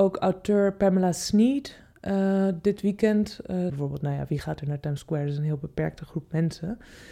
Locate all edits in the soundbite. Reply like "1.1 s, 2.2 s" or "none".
3.7 s